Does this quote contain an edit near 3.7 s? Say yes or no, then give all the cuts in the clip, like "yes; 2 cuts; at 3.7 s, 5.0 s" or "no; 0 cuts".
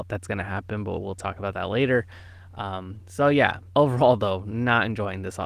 yes; 1 cut; at 3.7 s